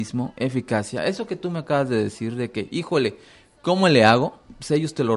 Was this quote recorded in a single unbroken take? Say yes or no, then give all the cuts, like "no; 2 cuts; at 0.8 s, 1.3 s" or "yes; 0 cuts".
yes; 0 cuts